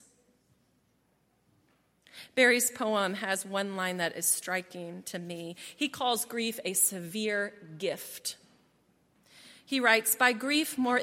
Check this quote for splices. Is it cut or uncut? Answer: uncut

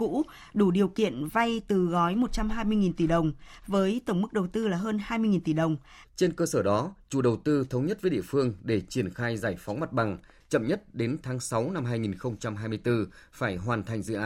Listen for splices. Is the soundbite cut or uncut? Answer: cut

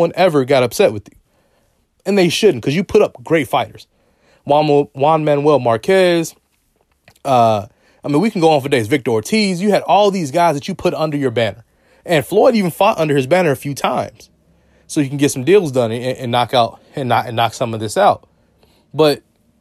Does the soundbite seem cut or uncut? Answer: uncut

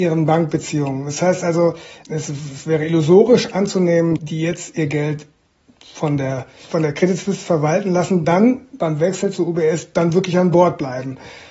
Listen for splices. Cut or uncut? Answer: cut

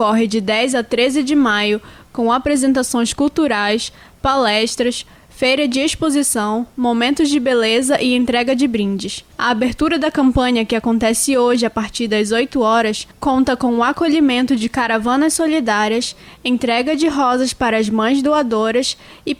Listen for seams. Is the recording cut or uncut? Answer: uncut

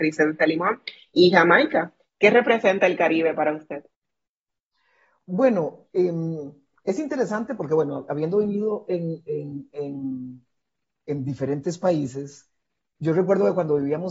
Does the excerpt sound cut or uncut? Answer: uncut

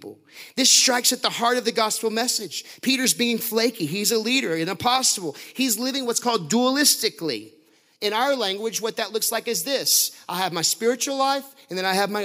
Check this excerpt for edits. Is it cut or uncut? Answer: uncut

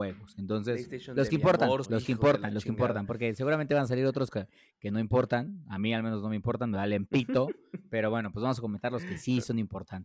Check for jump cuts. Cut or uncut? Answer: cut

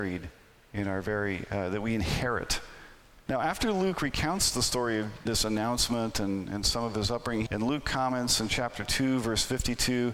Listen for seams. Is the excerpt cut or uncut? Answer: cut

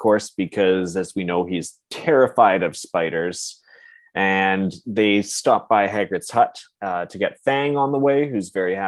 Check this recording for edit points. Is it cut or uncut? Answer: uncut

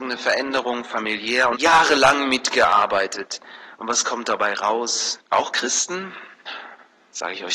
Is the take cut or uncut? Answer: cut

